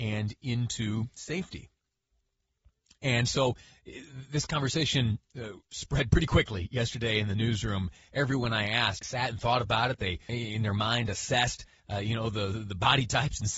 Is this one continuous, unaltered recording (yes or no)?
no